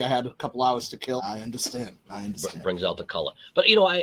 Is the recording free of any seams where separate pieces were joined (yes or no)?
no